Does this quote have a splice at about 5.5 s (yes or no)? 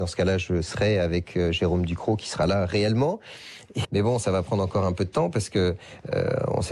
no